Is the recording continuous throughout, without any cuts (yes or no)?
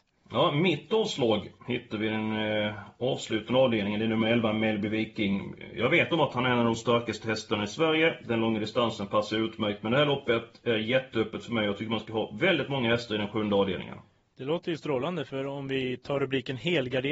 yes